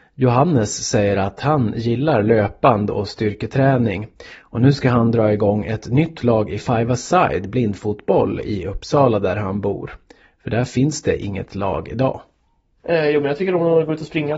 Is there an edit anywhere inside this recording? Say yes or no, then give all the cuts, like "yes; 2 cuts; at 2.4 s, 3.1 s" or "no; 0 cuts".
no; 0 cuts